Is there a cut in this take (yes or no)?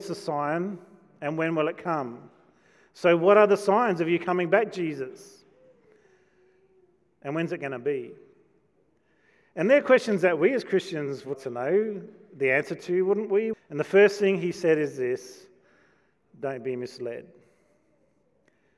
yes